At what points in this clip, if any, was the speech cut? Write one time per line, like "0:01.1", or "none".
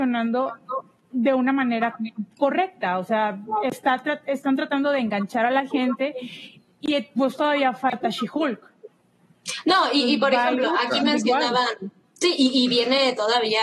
none